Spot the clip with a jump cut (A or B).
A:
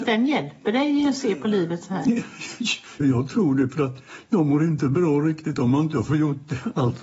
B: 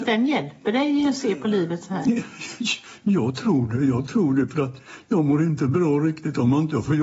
A